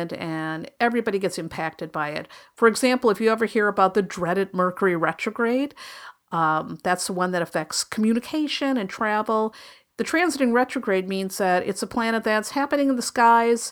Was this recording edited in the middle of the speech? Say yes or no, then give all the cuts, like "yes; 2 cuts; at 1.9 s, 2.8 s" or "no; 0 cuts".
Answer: yes; 1 cut; at 9.9 s